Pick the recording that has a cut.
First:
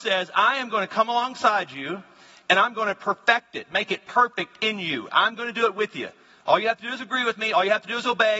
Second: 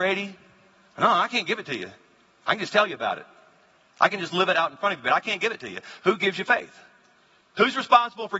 second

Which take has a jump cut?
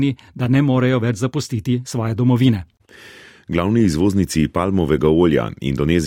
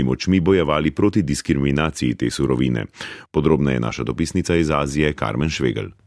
second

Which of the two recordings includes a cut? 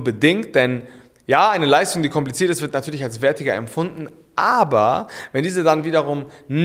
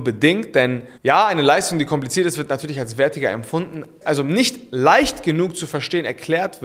second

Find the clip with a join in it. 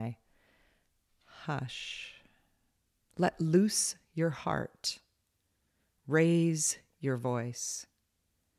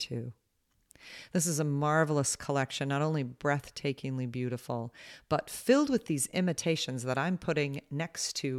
first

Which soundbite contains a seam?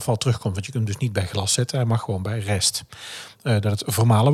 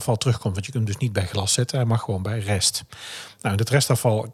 first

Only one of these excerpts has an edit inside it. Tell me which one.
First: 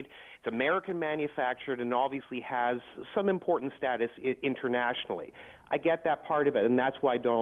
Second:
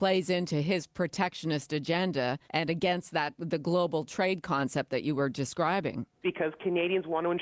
second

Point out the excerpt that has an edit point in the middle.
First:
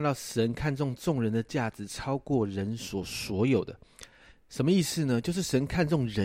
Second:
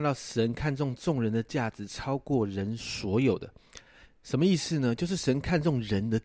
second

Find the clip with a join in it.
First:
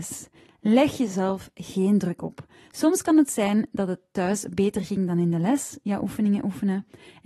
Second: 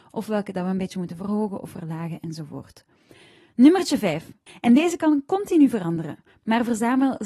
second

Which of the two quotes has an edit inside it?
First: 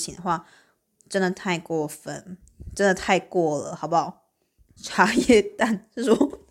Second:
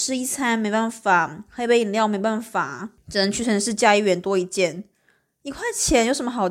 first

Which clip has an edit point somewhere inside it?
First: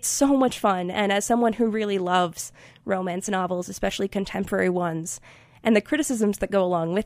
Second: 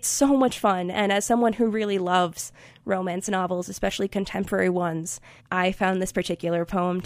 second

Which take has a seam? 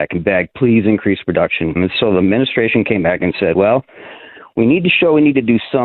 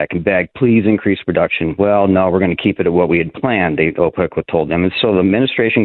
first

